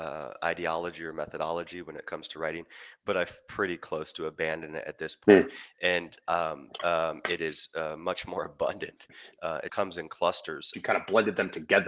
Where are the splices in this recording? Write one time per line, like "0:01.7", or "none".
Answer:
0:06.8
0:09.7
0:10.7